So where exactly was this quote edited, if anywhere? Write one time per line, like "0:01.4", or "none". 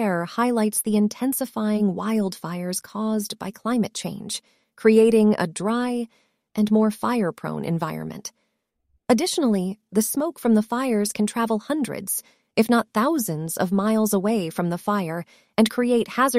none